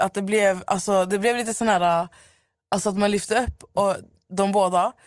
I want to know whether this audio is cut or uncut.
uncut